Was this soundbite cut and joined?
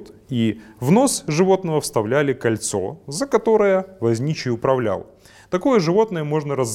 no; 0 cuts

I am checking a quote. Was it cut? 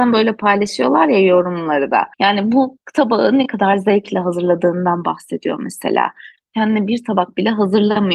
yes; 2 cuts; at 2.1 s, 6.4 s

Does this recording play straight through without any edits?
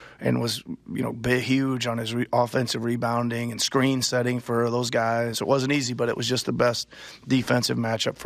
no; 1 cut; at 5.3 s

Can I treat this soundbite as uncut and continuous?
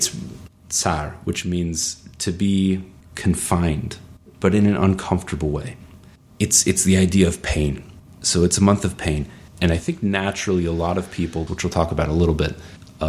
no; 2 cuts; at 9.6 s, 11.5 s

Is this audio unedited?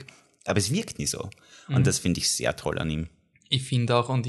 yes; 0 cuts

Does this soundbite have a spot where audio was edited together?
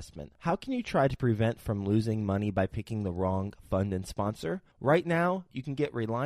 no; 0 cuts

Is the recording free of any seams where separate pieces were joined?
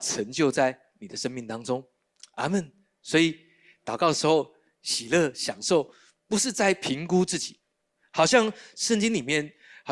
yes; 0 cuts

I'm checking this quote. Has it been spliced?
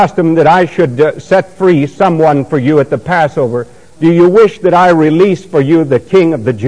no; 0 cuts

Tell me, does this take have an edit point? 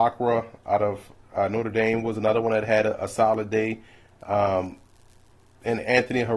no; 0 cuts

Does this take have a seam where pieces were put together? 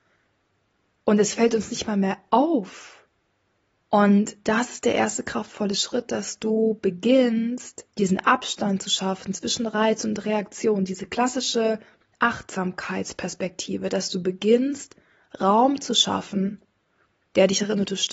yes; 2 cuts; at 3.8 s, 7.9 s

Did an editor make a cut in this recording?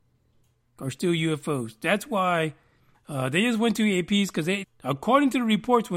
yes; 2 cuts; at 2.9 s, 4.6 s

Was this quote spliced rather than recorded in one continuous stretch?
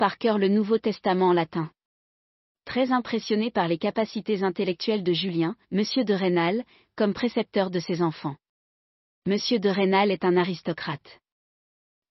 yes; 1 cut; at 5.6 s

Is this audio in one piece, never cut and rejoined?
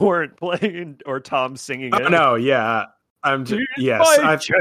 yes; 0 cuts

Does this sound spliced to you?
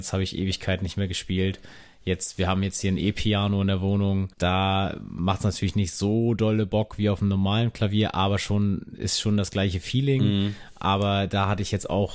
yes; 1 cut; at 4.3 s

